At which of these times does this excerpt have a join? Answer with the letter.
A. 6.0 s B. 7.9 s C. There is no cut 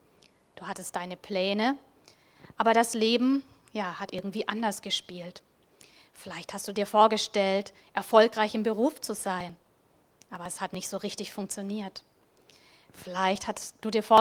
C